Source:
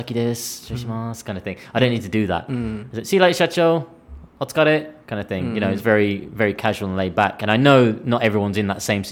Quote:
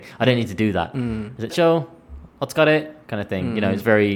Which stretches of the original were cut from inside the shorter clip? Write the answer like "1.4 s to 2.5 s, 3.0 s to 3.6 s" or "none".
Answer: 3.0 s to 3.5 s